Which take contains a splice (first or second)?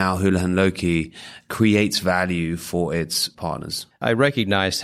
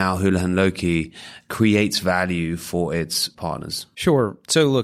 first